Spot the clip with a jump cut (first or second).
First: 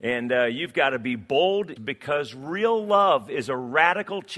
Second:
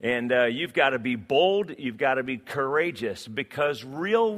first